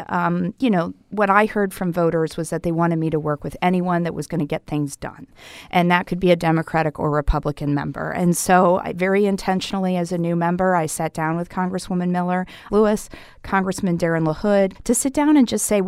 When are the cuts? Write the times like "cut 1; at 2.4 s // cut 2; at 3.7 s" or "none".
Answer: cut 1; at 12.7 s // cut 2; at 14.7 s